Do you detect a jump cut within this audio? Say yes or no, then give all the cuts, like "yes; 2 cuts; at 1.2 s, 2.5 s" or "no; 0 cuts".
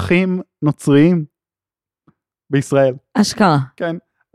no; 0 cuts